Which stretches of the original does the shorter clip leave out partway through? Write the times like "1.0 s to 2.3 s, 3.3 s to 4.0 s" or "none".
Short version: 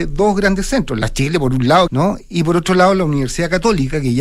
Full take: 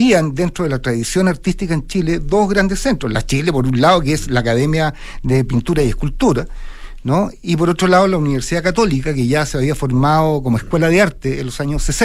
4.0 s to 7.0 s